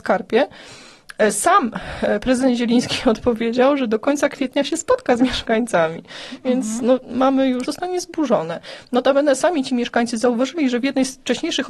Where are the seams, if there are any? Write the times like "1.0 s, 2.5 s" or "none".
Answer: 7.6 s